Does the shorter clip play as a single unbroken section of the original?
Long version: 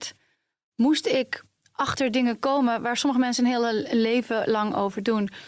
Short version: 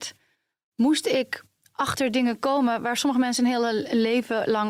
yes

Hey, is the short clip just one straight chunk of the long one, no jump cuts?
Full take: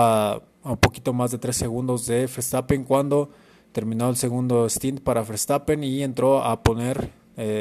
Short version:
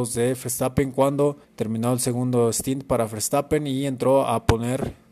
no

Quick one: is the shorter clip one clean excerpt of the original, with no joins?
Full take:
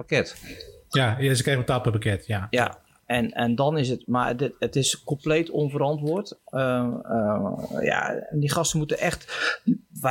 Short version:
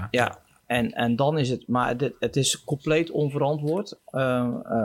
yes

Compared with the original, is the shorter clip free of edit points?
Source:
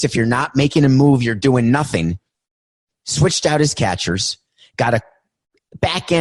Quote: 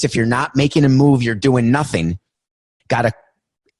no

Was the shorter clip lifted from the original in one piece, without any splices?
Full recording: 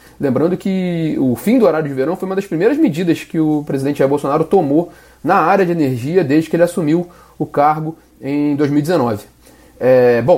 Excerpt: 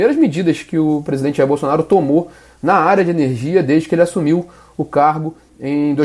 yes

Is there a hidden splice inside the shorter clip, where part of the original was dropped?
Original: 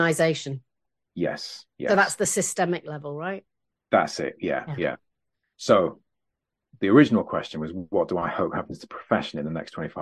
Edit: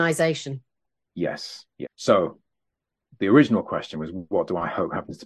yes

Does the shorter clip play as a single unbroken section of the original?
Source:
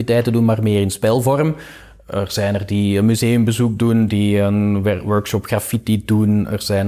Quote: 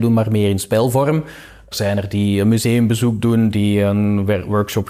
no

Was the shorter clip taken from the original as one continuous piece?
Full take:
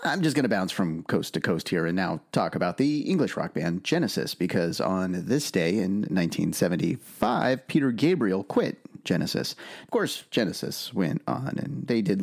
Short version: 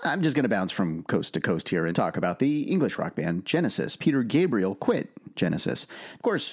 no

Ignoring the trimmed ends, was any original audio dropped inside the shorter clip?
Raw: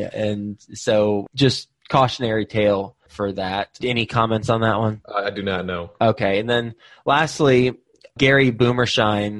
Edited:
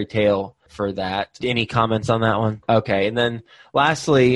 yes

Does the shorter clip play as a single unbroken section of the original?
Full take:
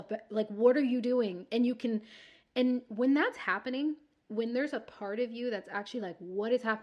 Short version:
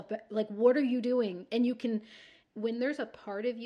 no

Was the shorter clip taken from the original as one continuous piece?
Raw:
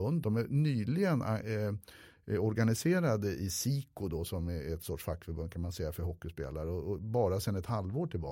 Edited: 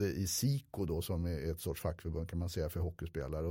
yes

